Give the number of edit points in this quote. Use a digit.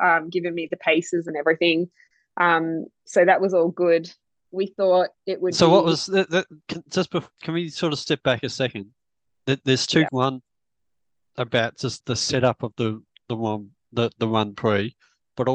2